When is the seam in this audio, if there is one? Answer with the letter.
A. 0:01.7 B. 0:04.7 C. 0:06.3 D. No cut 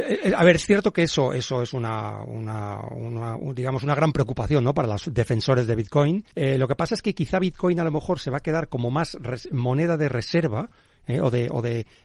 C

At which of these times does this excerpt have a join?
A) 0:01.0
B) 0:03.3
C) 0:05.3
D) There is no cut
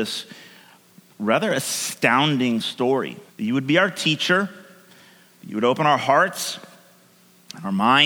B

